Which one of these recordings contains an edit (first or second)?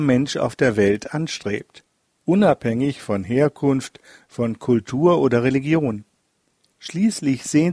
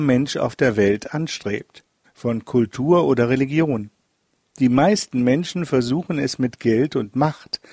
second